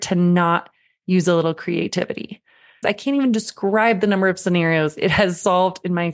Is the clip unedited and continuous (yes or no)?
no